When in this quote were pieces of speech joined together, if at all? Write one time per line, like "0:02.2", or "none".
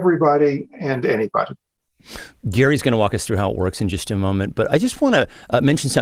none

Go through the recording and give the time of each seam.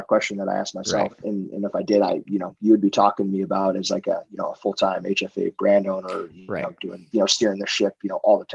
0:01.2
0:07.1

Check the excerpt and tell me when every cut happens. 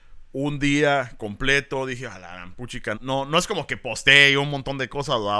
0:02.9

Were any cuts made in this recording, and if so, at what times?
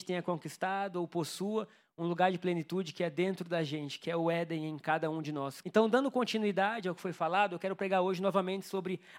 0:05.6

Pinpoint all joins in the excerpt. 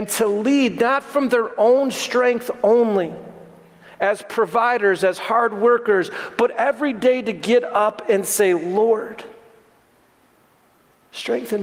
none

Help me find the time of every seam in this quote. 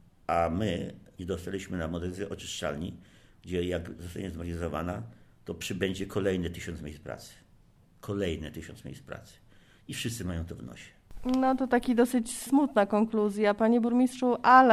none

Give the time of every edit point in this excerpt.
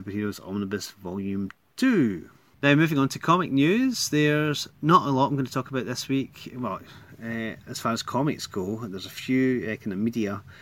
none

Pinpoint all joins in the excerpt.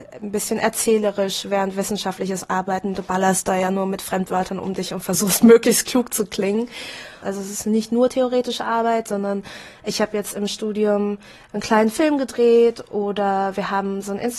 0:07.2

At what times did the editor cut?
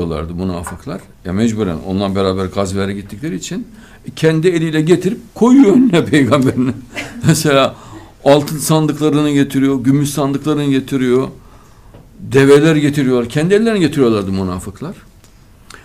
none

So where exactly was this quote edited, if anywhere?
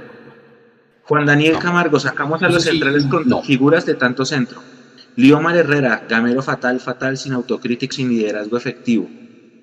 0:06.8
0:07.9

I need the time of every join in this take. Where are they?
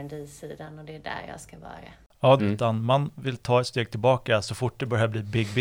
0:02.4

